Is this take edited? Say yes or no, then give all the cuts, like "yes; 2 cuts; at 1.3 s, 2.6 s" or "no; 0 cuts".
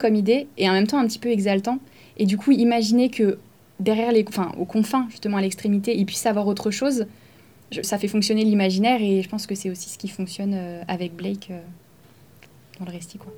yes; 1 cut; at 7.8 s